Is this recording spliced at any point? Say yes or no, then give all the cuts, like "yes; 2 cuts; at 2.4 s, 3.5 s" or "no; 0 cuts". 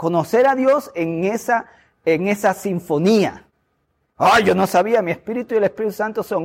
no; 0 cuts